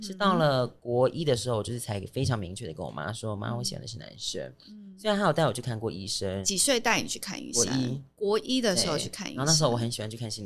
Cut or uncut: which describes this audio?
uncut